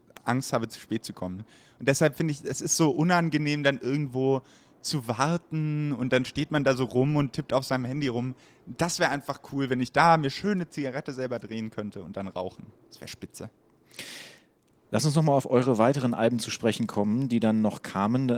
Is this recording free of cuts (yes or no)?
yes